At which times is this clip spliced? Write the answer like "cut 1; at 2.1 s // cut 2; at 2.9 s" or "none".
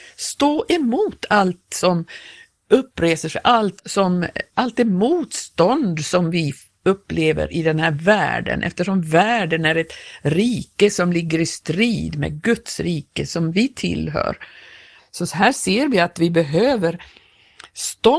cut 1; at 3.8 s // cut 2; at 15.0 s